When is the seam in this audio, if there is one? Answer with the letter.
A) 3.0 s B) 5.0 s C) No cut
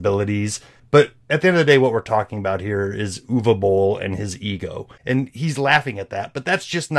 B